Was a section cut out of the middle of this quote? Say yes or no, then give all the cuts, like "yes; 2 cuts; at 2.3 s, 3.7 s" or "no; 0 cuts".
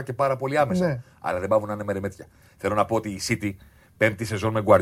no; 0 cuts